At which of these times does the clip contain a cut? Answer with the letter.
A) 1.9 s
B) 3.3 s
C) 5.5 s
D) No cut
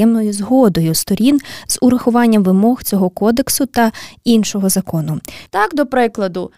C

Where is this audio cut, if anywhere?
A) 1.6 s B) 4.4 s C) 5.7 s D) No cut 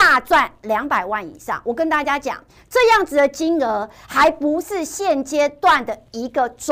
D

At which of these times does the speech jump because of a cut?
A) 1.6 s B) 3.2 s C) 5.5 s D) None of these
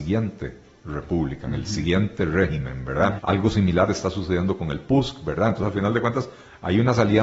B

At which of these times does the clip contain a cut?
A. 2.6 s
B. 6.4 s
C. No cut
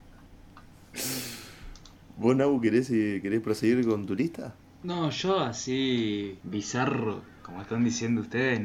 B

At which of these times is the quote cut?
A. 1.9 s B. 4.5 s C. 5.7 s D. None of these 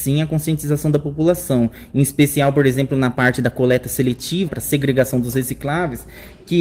B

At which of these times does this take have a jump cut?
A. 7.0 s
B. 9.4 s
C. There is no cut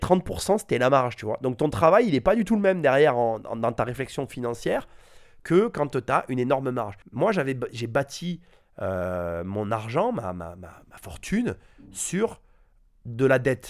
A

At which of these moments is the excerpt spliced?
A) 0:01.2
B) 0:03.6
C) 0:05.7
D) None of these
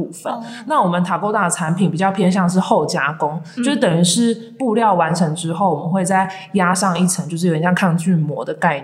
D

